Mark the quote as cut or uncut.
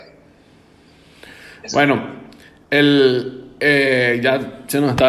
uncut